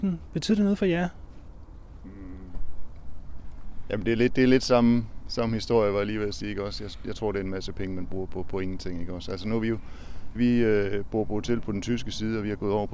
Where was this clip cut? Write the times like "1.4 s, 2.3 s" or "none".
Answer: 10.4 s